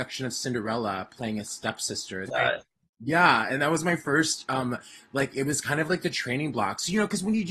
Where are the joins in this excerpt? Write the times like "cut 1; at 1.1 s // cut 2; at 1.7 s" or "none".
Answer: cut 1; at 2.3 s